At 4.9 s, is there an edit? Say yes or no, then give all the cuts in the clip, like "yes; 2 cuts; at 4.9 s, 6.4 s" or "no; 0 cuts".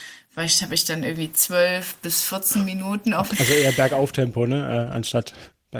no; 1 cut; at 3.3 s